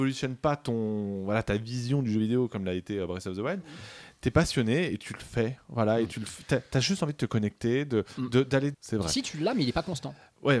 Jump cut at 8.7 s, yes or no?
yes